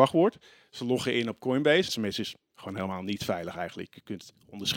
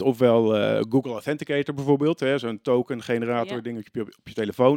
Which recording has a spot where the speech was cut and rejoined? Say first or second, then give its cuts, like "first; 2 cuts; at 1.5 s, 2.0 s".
first; 1 cut; at 1.9 s